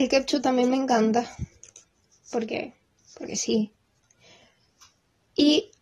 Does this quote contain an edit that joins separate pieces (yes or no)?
no